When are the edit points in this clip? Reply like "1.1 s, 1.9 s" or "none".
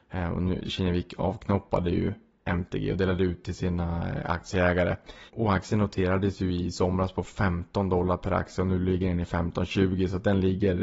5.3 s